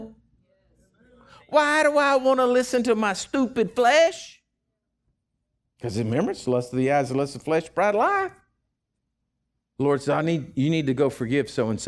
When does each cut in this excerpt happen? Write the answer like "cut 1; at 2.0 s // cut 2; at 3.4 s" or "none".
none